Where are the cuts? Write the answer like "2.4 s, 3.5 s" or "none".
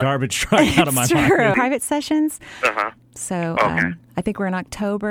1.5 s, 3.0 s